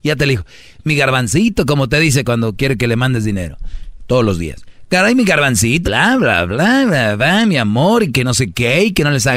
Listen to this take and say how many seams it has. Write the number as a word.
one